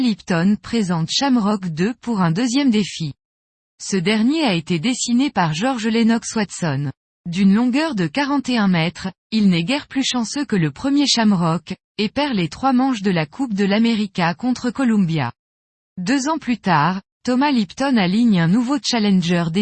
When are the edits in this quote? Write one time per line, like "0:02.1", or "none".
none